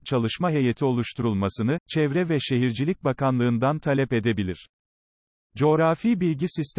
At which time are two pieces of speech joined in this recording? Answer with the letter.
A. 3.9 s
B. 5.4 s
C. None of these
B